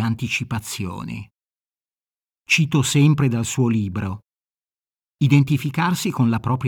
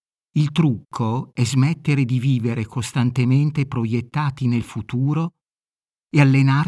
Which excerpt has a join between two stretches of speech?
first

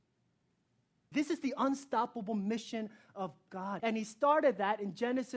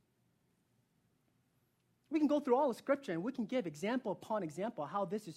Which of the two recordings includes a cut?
first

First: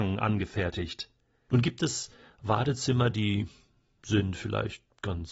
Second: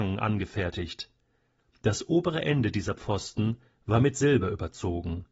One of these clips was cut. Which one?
first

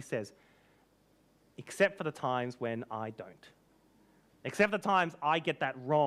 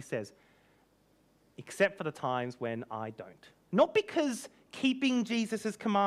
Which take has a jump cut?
second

